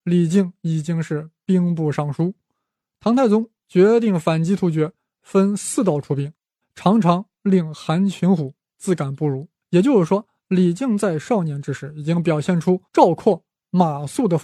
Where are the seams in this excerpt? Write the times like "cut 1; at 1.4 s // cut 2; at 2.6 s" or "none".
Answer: cut 1; at 6.6 s // cut 2; at 9.6 s // cut 3; at 12.9 s